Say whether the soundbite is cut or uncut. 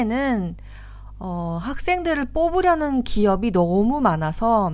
uncut